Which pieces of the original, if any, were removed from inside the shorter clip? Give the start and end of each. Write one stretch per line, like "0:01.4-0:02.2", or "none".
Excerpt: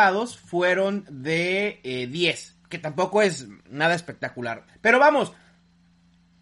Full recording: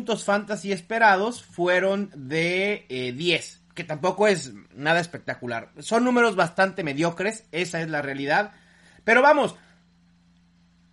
0:05.7-0:08.9